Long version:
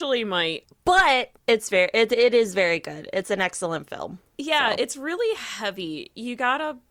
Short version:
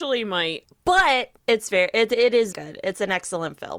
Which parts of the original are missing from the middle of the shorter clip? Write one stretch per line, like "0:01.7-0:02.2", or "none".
0:02.5-0:02.8